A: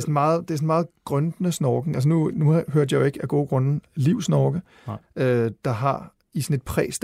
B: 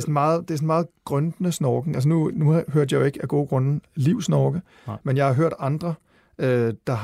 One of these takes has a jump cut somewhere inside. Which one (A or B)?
A